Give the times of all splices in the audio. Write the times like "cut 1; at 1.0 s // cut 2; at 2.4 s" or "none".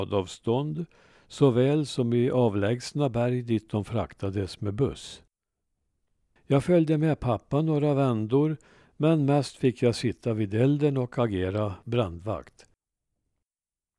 cut 1; at 6.4 s